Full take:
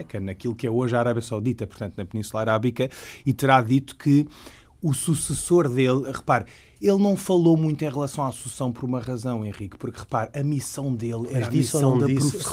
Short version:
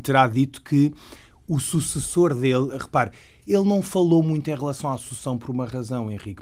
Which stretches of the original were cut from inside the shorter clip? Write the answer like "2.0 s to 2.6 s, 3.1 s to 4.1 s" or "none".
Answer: none